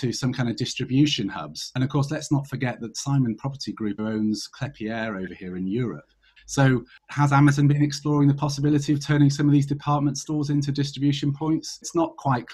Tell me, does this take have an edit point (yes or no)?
yes